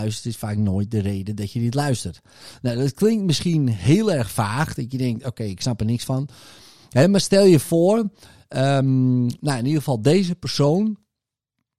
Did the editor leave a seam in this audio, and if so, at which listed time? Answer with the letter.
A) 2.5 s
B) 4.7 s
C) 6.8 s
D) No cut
D